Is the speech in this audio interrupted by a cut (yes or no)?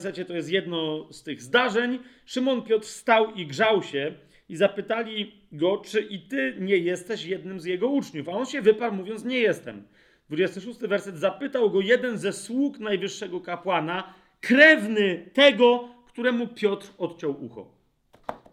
no